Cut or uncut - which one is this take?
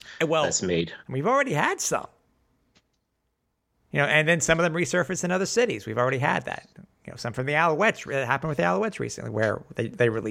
cut